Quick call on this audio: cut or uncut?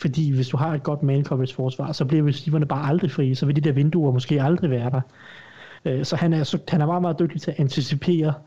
cut